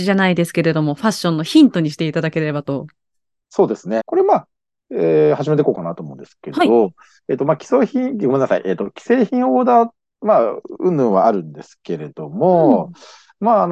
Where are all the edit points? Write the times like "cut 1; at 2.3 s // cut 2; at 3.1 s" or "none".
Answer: cut 1; at 4.0 s

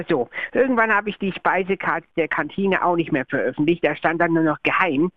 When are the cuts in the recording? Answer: none

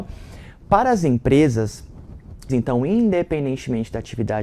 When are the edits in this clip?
cut 1; at 2.5 s

